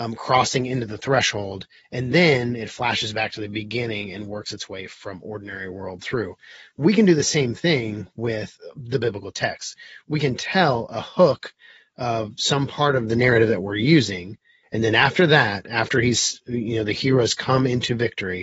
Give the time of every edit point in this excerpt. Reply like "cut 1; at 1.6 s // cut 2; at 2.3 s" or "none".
cut 1; at 14.6 s